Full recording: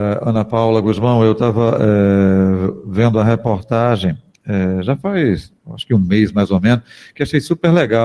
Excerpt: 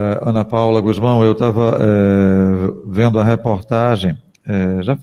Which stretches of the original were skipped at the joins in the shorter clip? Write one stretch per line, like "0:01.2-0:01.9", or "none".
none